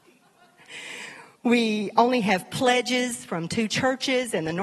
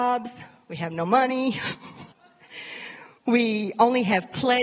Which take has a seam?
second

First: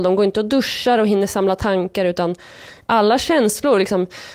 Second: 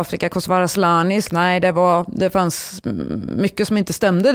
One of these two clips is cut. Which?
second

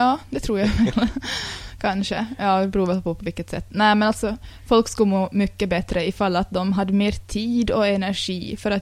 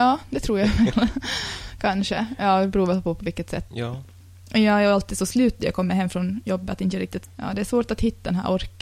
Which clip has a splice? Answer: second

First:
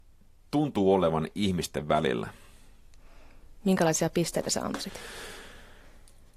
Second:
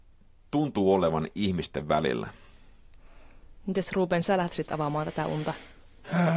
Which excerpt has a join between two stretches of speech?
first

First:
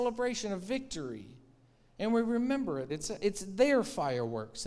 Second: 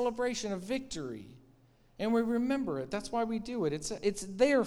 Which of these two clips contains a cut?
first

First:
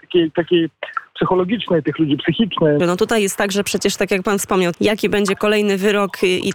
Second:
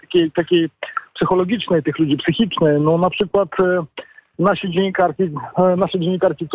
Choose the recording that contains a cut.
first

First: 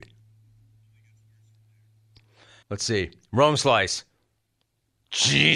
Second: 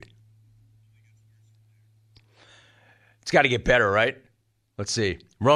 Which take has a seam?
first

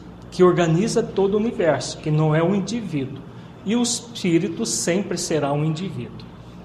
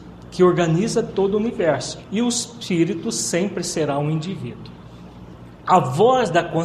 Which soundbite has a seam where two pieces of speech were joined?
second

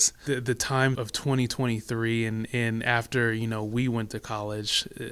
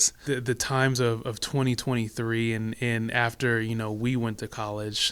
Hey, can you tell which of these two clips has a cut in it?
first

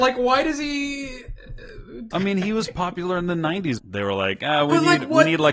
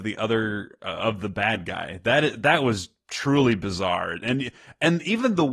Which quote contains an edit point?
first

